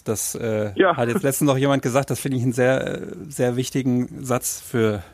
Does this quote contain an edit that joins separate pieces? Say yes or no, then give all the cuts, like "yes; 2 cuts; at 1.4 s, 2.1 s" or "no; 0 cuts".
no; 0 cuts